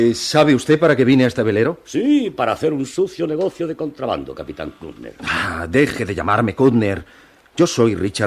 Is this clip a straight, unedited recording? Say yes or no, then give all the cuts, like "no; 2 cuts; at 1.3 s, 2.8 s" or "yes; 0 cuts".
yes; 0 cuts